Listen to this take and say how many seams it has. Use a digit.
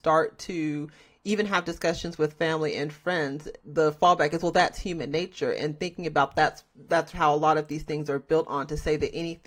1